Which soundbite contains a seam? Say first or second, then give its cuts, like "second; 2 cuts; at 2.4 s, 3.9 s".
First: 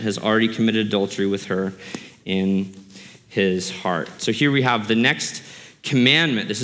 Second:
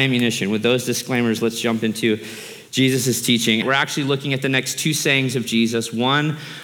second; 1 cut; at 3.6 s